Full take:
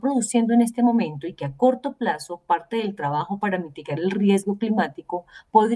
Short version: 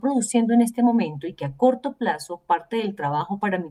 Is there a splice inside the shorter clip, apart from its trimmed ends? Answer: no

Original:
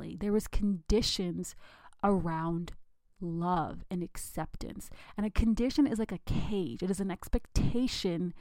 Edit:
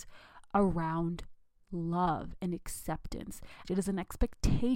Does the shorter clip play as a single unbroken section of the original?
no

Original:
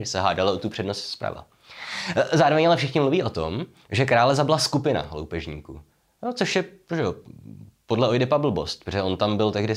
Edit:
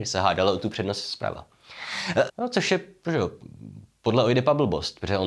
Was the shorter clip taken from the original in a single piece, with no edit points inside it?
no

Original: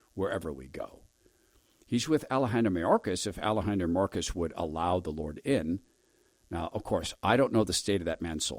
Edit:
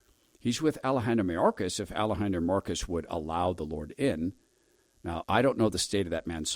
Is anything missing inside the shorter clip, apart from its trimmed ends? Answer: yes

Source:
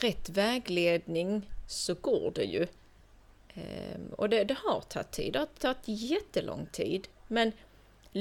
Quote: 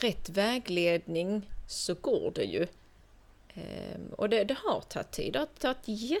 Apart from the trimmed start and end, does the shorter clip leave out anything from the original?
no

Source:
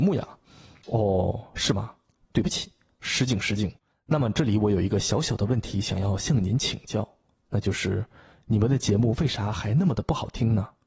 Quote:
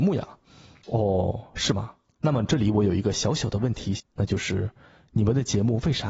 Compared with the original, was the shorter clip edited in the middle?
yes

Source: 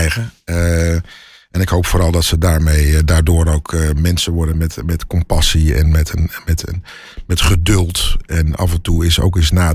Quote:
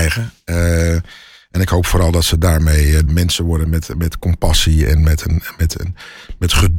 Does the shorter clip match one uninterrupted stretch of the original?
no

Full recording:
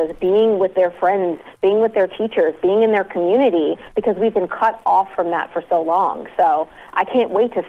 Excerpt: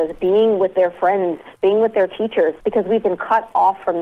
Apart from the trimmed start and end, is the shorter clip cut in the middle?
yes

